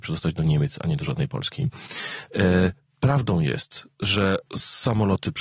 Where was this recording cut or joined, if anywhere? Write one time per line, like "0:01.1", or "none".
0:04.5